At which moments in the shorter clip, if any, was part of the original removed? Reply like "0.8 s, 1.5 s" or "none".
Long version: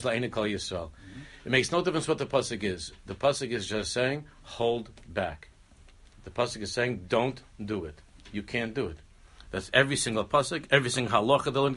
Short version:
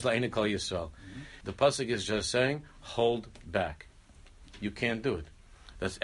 1.4 s, 4.4 s